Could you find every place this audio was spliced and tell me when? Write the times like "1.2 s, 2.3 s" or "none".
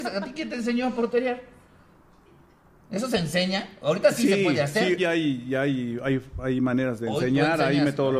5.0 s